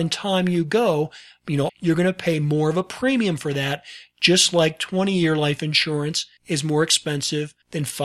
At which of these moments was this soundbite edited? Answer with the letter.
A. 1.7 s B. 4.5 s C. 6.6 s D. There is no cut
A